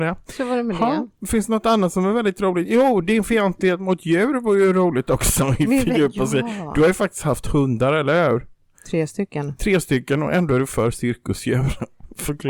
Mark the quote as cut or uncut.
uncut